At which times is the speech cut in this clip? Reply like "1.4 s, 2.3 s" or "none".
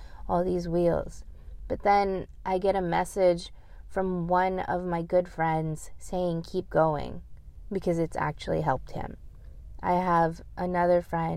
none